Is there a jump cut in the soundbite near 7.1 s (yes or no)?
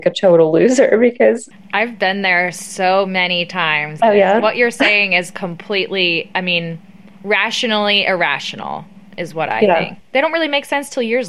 no